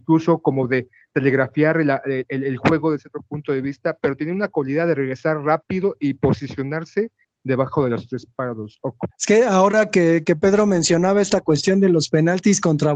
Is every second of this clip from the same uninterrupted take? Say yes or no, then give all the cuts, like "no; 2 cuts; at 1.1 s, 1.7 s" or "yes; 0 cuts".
no; 1 cut; at 9.1 s